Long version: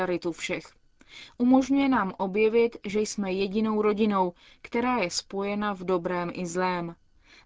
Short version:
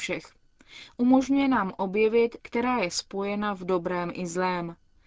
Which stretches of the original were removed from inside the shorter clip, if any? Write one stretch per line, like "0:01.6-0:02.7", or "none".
0:02.8-0:04.6